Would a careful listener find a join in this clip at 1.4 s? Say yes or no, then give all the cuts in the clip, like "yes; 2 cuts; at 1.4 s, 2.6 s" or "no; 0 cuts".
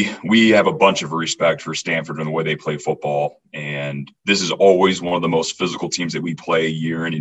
no; 1 cut; at 4.2 s